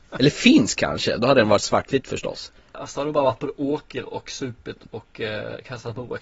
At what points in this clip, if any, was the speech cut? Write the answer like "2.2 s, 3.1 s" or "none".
none